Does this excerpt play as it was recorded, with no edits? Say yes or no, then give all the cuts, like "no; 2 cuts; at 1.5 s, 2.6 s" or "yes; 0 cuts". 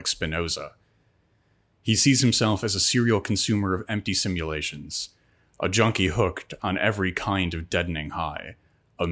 yes; 0 cuts